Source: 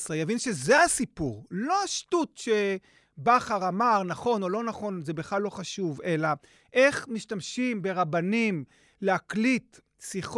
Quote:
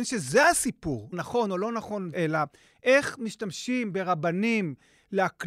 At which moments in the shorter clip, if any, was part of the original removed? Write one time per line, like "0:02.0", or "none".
0:01.1
0:02.1